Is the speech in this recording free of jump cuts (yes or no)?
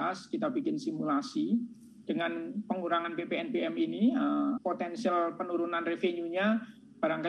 no